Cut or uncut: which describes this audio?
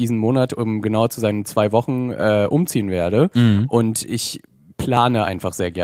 uncut